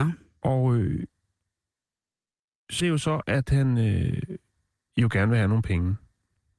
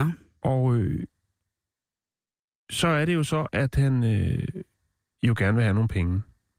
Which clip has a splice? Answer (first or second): first